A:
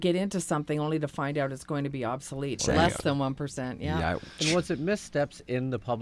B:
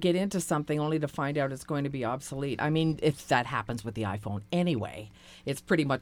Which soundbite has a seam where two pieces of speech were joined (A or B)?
A